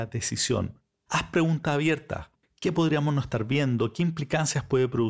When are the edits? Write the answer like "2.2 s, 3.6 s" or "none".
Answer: 2.4 s